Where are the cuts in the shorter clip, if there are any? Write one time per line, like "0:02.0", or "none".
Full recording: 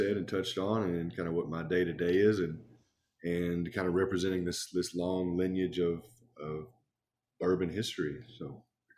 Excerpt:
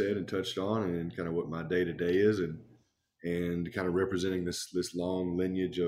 none